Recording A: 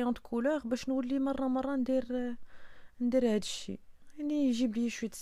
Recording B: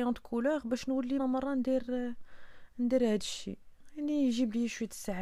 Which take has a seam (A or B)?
B